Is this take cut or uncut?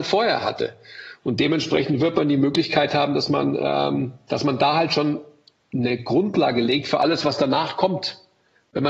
uncut